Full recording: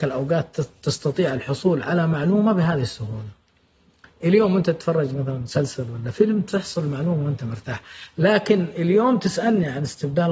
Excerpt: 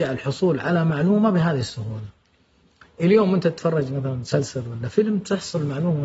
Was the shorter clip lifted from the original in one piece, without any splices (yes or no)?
yes